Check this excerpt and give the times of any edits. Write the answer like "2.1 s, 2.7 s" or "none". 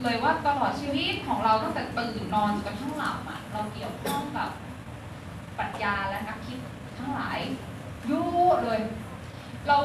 none